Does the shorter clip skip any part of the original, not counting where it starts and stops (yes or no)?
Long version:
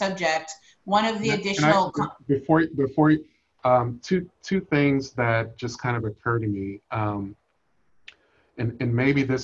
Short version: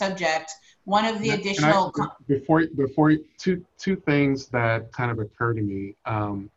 yes